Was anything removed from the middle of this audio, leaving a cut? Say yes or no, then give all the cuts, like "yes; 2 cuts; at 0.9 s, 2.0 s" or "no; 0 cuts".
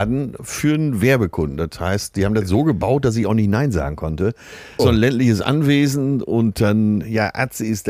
yes; 1 cut; at 4.8 s